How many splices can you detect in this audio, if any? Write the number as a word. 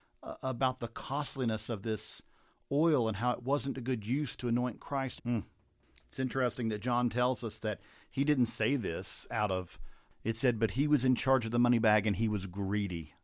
two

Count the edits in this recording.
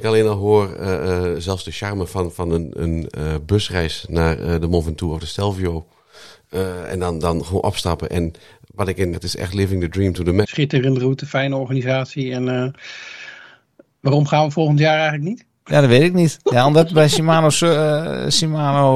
three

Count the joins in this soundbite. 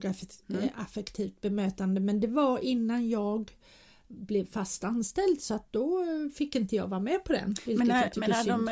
zero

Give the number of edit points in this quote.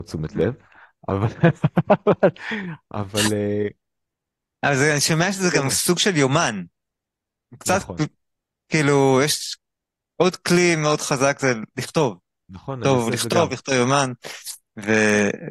zero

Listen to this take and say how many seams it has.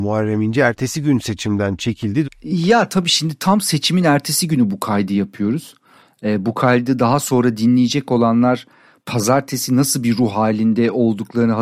one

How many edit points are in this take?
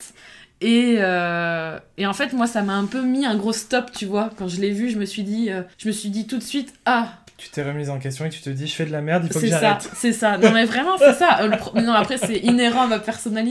one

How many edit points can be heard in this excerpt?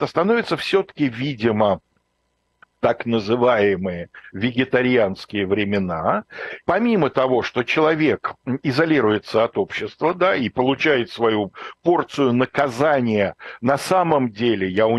one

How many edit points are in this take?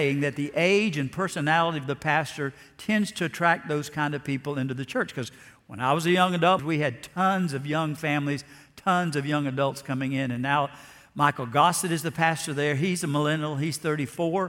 one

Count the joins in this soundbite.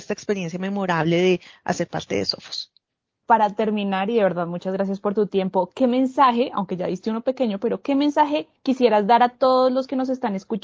one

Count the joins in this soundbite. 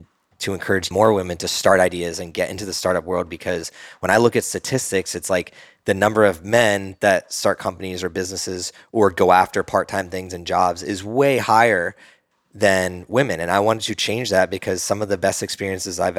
one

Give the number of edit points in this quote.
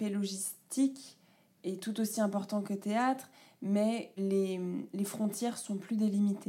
one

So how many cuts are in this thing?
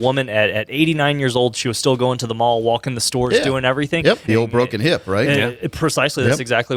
one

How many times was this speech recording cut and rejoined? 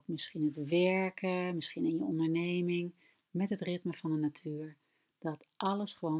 zero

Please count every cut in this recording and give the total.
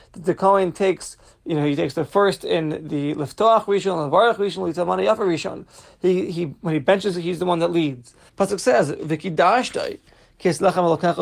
two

